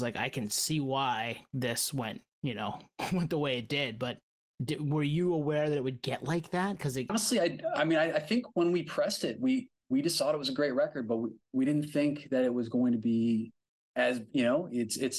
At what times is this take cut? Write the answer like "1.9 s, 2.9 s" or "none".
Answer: 7.1 s